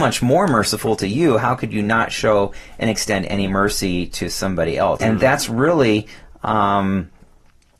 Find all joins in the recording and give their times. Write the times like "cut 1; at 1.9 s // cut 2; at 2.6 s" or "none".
cut 1; at 5.0 s